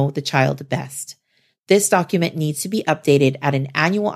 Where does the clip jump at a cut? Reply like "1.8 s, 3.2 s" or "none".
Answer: none